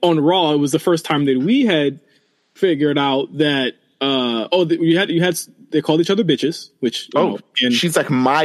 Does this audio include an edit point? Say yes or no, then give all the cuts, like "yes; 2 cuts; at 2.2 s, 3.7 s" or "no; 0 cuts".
no; 0 cuts